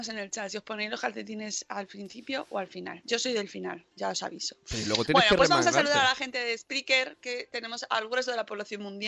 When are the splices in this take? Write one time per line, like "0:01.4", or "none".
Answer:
none